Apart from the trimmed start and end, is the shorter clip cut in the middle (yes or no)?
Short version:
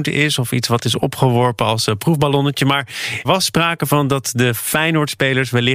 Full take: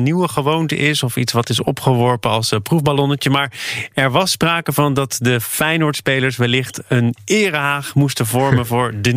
yes